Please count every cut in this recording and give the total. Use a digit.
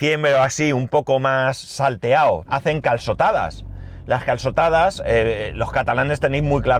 1